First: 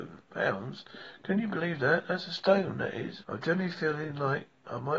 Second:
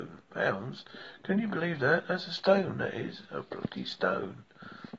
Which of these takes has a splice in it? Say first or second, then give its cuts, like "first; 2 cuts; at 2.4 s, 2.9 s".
first; 1 cut; at 3.2 s